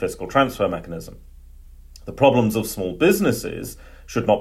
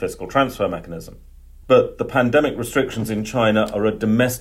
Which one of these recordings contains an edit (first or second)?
second